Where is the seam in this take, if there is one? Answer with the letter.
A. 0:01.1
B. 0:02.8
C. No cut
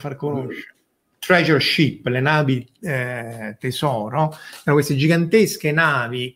A